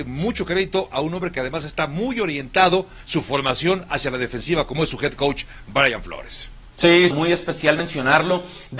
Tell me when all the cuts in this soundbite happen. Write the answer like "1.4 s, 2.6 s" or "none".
7.1 s